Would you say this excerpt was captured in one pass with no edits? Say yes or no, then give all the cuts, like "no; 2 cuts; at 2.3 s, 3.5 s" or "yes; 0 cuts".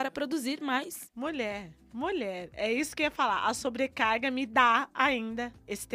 no; 1 cut; at 1.1 s